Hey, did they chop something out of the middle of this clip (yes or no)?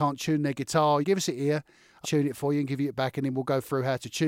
yes